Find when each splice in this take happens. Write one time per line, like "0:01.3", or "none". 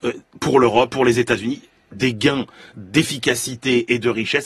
none